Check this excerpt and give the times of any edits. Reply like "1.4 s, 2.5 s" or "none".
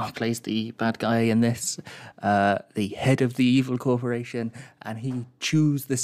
none